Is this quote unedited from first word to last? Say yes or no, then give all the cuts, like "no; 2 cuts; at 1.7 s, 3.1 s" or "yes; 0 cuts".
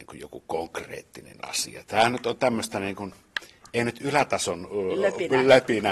yes; 0 cuts